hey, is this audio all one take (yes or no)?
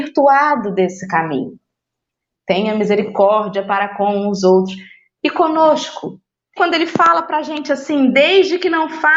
no